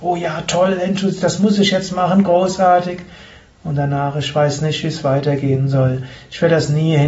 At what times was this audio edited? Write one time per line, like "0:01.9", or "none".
none